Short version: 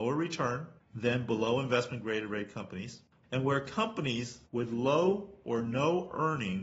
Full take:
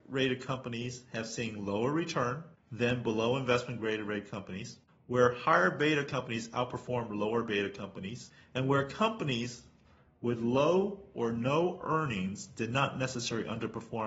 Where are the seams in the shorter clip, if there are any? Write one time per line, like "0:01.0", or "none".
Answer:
0:03.2
0:04.5